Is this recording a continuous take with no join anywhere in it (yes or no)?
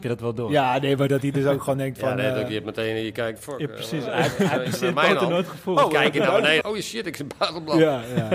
no